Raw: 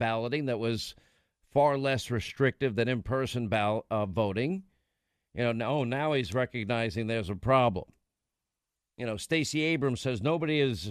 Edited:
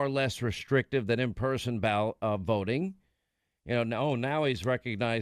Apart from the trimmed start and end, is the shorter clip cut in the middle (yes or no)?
no